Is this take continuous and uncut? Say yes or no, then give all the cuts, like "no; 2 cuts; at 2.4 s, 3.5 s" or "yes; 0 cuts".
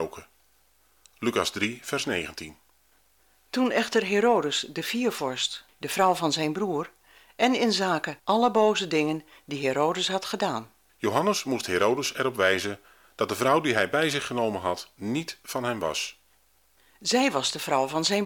no; 2 cuts; at 5.7 s, 10.9 s